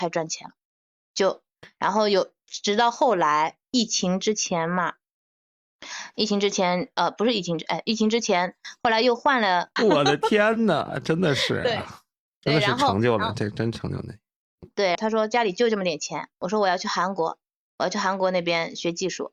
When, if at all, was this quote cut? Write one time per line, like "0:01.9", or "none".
0:01.8
0:09.8
0:15.0